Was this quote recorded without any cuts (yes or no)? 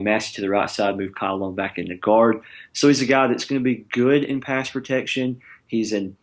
yes